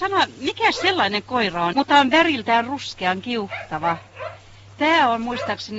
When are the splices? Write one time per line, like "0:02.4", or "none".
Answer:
0:01.7

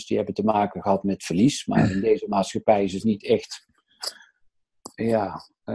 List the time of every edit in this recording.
none

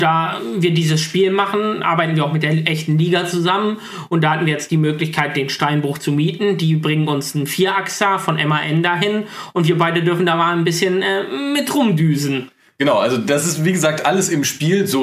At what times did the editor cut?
none

